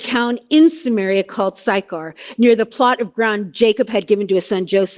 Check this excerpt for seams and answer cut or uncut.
uncut